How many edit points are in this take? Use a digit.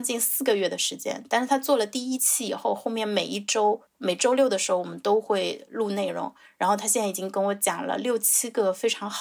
1